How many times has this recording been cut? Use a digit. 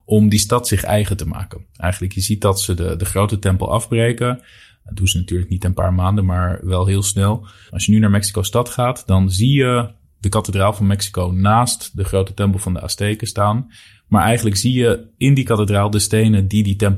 1